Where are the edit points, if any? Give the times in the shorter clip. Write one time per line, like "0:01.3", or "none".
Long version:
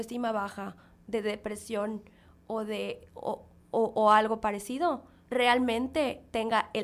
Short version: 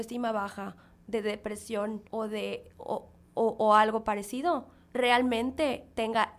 0:02.1